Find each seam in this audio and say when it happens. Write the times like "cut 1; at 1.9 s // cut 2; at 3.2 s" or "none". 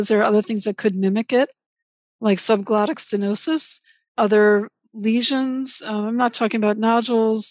none